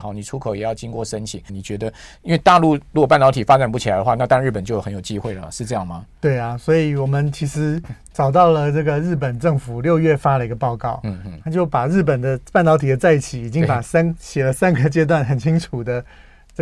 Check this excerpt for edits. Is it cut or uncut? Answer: cut